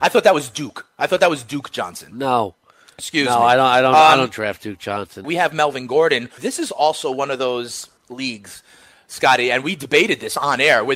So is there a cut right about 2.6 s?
no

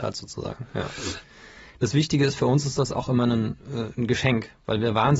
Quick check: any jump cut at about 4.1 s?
no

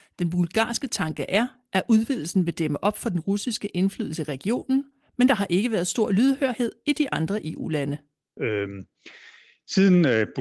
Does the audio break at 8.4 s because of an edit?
yes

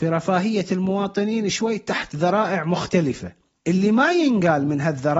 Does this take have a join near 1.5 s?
yes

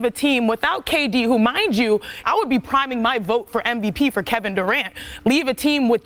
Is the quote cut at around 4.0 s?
no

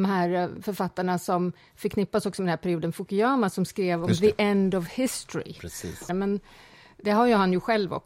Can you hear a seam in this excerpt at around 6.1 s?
yes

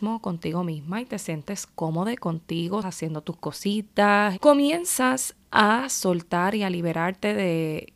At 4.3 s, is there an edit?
yes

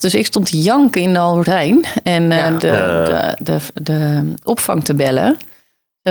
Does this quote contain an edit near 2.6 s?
yes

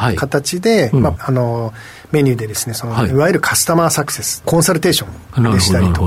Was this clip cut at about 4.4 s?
yes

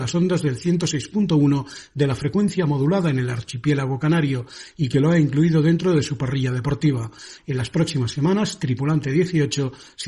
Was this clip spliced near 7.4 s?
yes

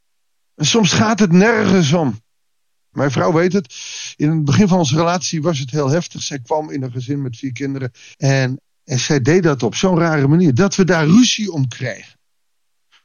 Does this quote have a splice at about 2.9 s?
yes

